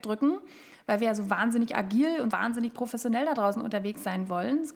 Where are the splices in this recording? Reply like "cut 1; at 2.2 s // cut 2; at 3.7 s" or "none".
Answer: cut 1; at 2.3 s